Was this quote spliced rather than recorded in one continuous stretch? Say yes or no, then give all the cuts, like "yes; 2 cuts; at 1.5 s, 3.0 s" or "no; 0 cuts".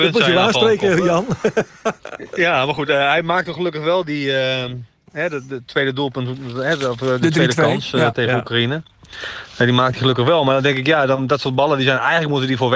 no; 0 cuts